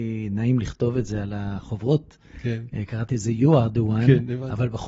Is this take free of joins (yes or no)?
yes